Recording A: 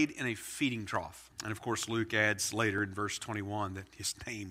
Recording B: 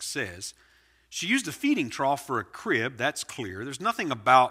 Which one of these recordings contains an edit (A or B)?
A